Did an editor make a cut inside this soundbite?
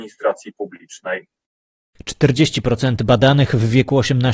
no; 0 cuts

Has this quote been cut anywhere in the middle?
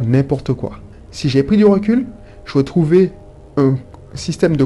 no; 0 cuts

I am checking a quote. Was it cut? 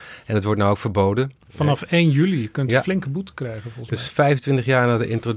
no; 0 cuts

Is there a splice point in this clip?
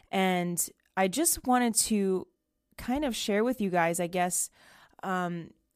no; 0 cuts

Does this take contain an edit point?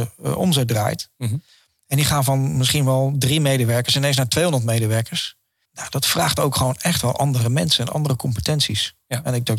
yes; 2 cuts; at 5.7 s, 7.9 s

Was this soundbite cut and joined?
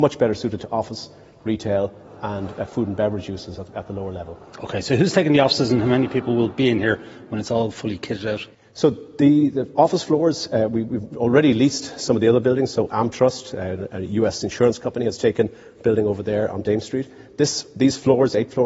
no; 0 cuts

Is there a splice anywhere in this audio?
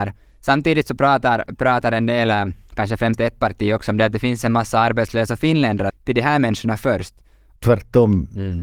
yes; 2 cuts; at 5.9 s, 7.6 s

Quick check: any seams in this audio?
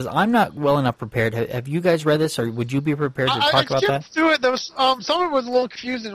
no; 0 cuts

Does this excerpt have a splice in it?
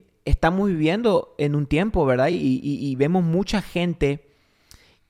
no; 0 cuts

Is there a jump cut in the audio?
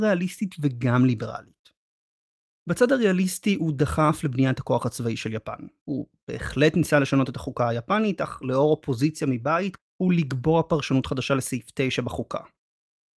yes; 2 cuts; at 2.5 s, 9.8 s

